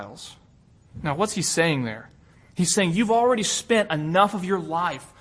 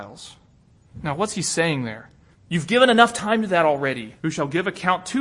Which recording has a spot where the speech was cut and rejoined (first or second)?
second